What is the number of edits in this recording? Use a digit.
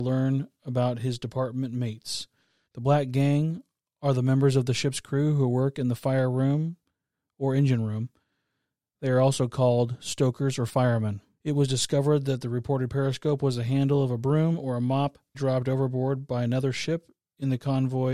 3